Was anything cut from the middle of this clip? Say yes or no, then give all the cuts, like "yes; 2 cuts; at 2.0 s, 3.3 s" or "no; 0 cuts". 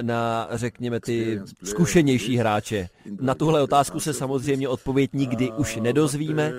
yes; 1 cut; at 3.2 s